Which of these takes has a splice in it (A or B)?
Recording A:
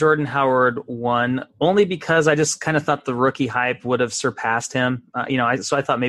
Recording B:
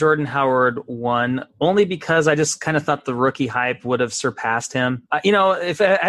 B